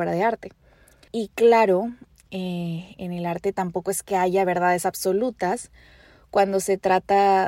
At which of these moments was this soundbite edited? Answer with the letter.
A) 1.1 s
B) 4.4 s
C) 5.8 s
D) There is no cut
A